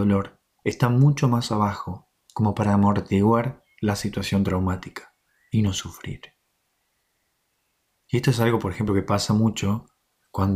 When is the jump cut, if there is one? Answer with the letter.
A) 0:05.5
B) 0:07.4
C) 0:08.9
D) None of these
D